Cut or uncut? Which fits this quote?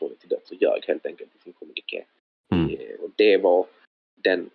cut